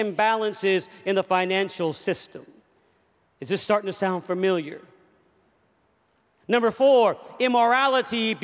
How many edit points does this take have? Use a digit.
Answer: 0